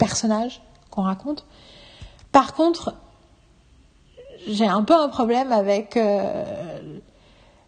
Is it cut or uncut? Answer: uncut